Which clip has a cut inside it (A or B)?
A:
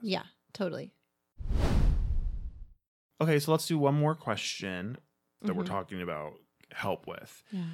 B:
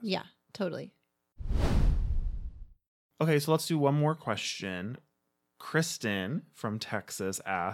A